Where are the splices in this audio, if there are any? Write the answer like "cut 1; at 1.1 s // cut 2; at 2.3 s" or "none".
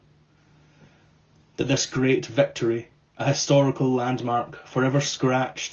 none